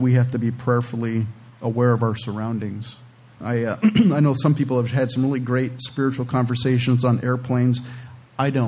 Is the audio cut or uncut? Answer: cut